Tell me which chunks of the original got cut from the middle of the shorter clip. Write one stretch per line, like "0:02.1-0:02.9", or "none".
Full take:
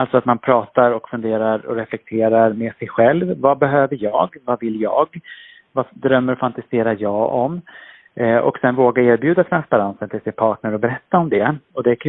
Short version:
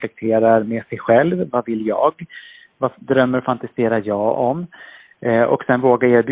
0:03.4-0:04.4